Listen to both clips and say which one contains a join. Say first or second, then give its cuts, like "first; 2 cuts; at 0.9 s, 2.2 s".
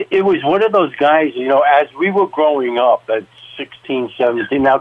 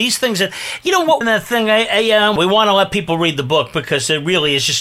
second; 2 cuts; at 1.2 s, 2.4 s